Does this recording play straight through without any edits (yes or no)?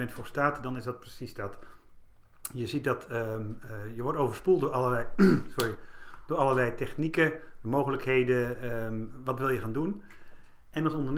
yes